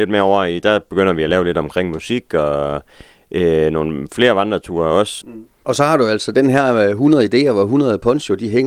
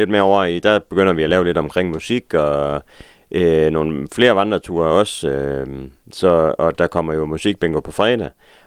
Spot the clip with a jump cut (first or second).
first